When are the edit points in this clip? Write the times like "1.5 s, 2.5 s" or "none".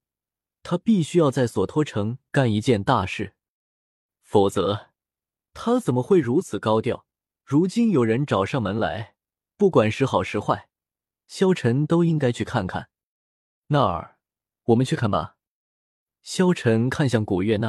7.4 s, 15.0 s